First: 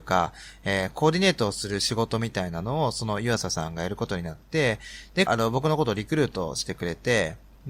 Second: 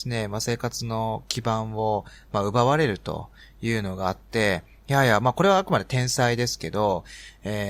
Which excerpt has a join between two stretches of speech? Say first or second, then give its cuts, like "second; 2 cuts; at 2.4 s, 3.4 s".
first; 1 cut; at 5.3 s